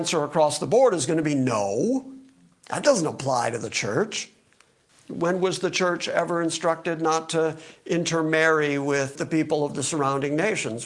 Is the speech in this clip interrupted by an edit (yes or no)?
no